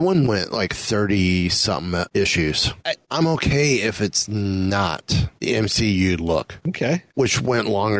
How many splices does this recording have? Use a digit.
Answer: 2